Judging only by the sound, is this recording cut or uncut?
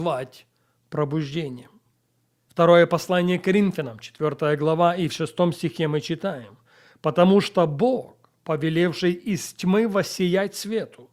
uncut